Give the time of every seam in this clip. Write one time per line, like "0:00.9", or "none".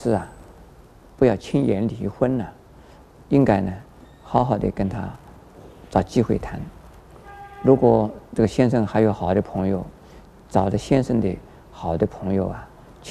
none